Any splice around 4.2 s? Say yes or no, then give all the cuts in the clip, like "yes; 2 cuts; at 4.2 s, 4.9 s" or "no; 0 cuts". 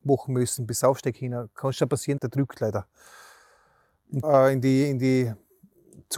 yes; 2 cuts; at 2.2 s, 4.2 s